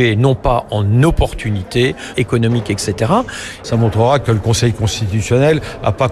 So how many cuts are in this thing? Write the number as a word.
two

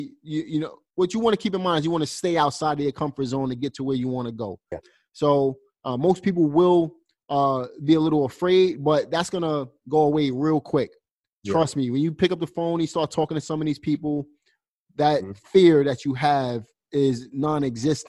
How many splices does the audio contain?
one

